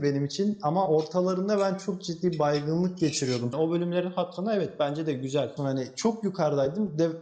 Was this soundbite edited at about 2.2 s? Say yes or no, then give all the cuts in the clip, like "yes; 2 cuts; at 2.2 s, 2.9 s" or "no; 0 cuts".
no; 2 cuts; at 3.5 s, 5.6 s